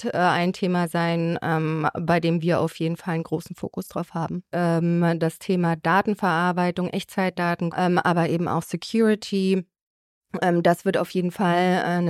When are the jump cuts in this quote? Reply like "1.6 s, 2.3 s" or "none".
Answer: 4.5 s, 7.7 s